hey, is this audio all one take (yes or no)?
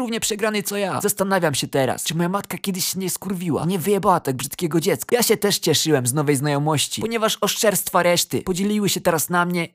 no